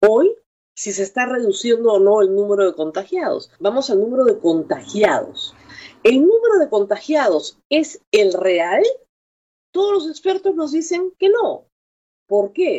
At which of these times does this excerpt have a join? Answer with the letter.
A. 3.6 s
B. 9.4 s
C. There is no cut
A